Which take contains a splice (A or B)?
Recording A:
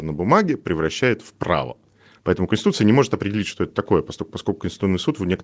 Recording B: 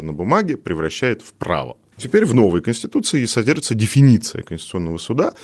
B